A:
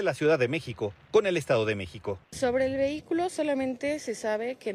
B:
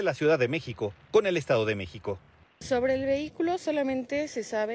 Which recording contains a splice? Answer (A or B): A